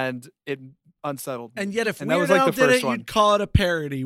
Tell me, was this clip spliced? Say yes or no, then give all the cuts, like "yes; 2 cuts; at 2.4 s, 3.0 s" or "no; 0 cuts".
no; 0 cuts